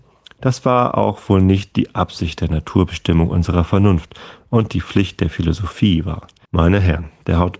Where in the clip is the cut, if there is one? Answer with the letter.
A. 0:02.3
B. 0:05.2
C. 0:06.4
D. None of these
C